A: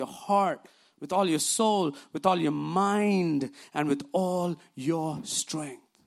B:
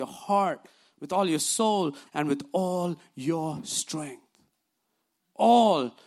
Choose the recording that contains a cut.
B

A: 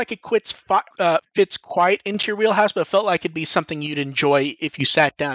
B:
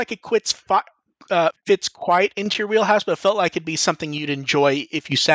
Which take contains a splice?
A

